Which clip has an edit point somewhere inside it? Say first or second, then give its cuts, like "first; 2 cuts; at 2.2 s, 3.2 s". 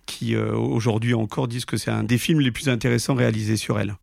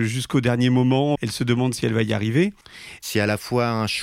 second; 2 cuts; at 1.1 s, 3.0 s